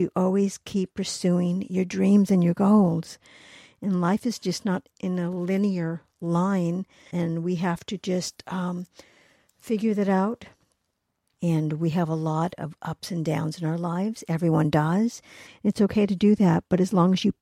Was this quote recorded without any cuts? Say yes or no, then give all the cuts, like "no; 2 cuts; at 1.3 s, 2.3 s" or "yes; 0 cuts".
no; 3 cuts; at 7.1 s, 11.4 s, 15.5 s